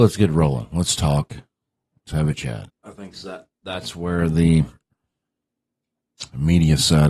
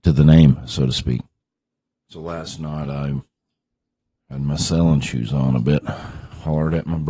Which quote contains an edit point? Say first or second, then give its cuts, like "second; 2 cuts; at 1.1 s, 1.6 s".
first; 1 cut; at 2.7 s